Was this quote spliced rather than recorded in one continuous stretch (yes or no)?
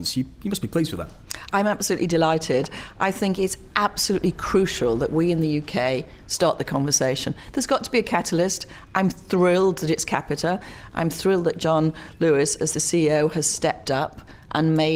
no